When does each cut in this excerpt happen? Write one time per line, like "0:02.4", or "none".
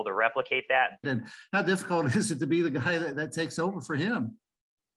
0:01.0